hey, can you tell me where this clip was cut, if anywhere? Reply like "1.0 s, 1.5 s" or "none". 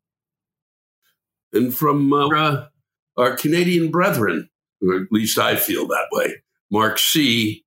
2.3 s